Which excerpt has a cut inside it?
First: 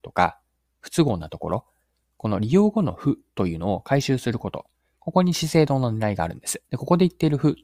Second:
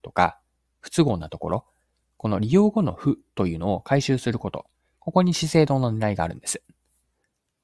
first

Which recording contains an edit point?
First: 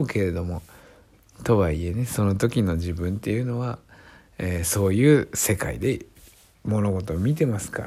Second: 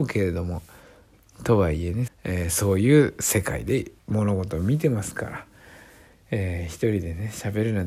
second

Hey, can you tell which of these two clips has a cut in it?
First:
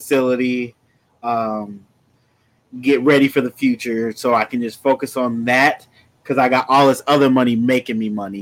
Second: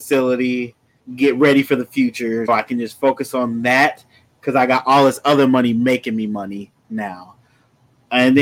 second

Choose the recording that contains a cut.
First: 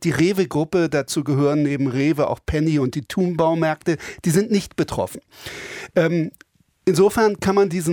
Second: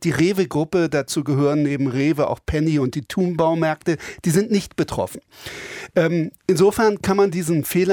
second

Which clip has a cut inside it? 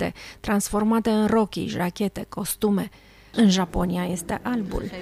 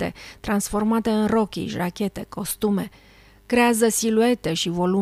first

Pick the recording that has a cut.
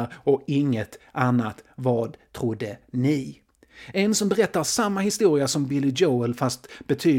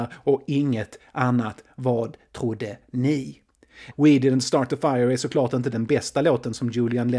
second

